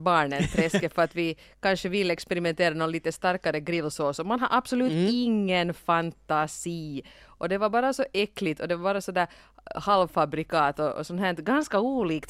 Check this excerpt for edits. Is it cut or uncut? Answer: uncut